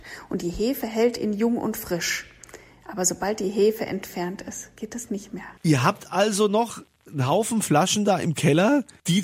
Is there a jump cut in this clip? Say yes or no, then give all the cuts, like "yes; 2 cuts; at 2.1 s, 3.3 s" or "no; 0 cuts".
no; 0 cuts